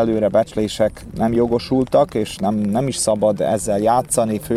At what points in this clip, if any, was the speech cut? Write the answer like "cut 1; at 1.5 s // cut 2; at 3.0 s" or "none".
none